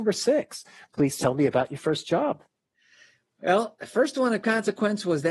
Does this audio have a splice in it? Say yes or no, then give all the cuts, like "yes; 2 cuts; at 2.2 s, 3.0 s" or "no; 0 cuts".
no; 0 cuts